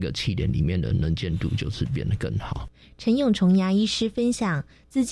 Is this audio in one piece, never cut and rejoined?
yes; 0 cuts

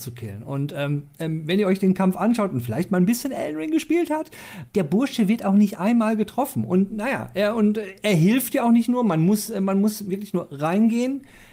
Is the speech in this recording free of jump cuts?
yes; 0 cuts

